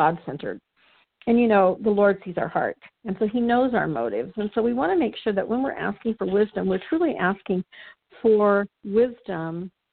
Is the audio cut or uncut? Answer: uncut